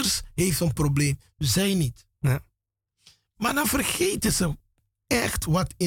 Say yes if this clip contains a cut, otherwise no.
no